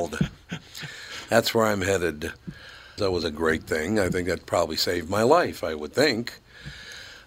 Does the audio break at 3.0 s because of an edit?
yes; 1 cut; at 3.0 s

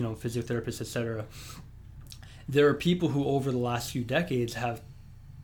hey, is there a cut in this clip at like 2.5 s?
no; 0 cuts

